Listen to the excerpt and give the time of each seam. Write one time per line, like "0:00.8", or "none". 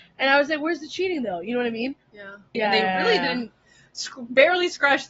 0:02.5

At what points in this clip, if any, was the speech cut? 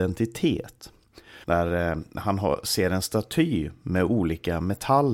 0:01.4

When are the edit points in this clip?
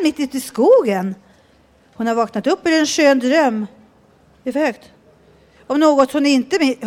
none

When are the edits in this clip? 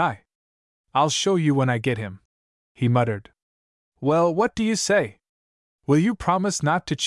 none

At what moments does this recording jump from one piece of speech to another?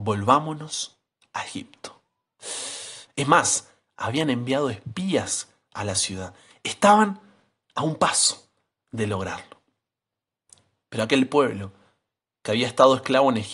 0:03.0

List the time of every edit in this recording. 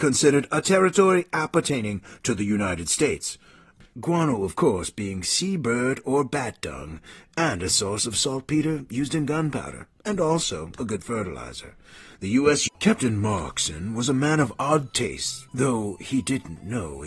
0:12.7
0:15.5

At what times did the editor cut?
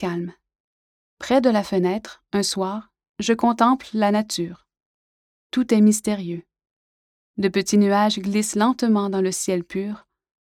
none

